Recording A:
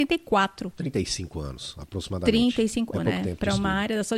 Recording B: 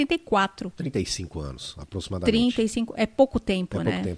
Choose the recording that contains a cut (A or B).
A